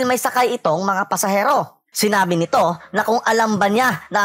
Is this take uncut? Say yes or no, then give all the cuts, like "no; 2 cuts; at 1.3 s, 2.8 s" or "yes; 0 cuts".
no; 1 cut; at 1.9 s